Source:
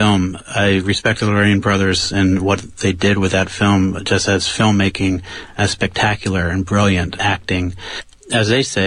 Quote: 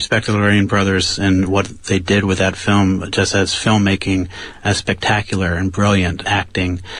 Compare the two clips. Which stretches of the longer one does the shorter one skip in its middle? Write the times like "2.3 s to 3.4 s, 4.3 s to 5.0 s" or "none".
none